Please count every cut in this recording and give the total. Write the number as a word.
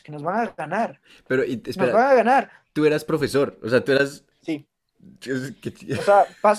zero